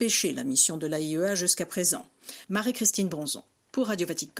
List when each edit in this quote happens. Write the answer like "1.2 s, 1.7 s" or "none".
2.4 s